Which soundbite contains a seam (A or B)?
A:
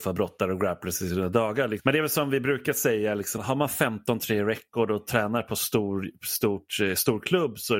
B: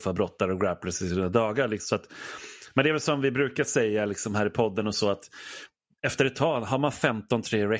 A